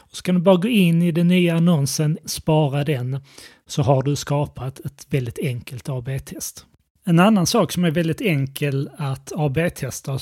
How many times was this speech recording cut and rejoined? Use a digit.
1